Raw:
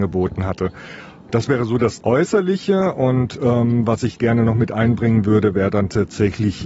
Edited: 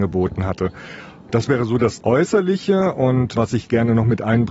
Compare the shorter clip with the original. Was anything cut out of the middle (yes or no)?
yes